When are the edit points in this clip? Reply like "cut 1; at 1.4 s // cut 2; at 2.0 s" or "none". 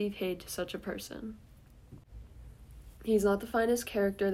cut 1; at 3.0 s

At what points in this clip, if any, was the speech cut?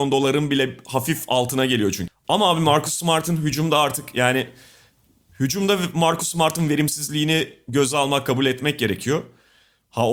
cut 1; at 2.1 s

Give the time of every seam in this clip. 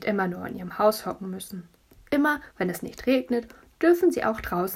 none

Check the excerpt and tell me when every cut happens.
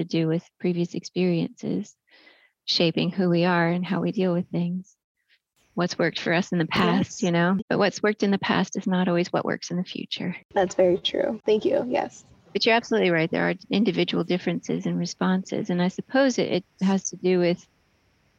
cut 1; at 7.6 s // cut 2; at 11.4 s

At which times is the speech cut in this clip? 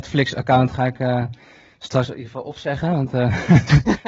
none

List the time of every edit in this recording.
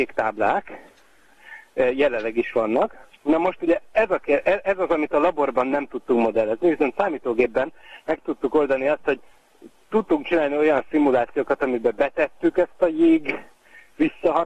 none

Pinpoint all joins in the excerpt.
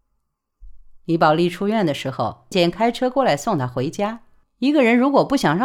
cut 1; at 2.5 s // cut 2; at 4.4 s

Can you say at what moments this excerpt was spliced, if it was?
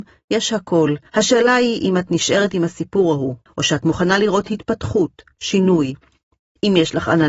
cut 1; at 1.1 s // cut 2; at 3.5 s

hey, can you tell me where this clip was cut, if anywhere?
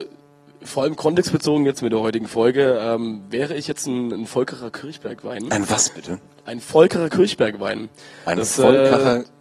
none

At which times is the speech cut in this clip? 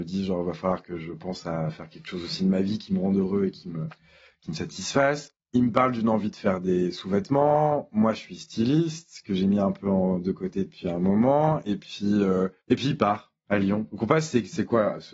none

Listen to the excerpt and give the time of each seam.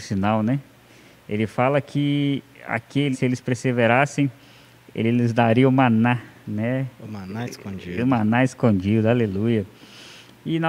cut 1; at 3.1 s

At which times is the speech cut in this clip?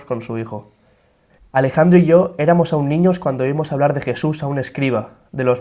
cut 1; at 1.4 s

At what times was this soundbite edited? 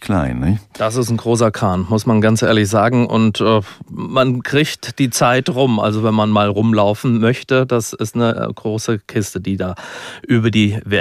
none

